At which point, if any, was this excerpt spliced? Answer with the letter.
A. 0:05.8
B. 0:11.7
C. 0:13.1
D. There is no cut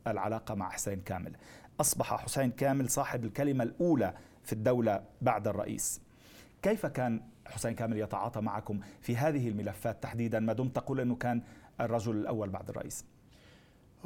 D